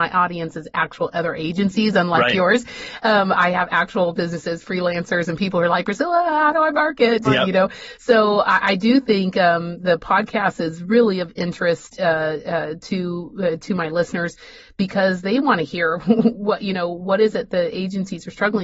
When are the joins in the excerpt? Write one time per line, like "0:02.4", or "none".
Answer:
0:07.2